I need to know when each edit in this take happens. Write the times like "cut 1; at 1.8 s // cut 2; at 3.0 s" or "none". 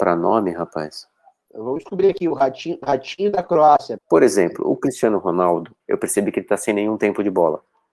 cut 1; at 4.0 s // cut 2; at 5.8 s